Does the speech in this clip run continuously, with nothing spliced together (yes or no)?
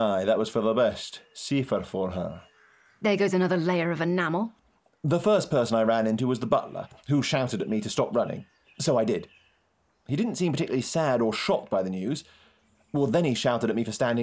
yes